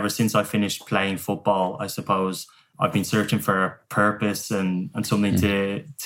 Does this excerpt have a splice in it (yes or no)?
no